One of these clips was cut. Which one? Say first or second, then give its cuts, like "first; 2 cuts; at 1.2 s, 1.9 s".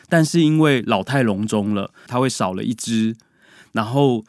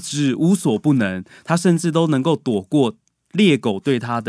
first; 1 cut; at 2.1 s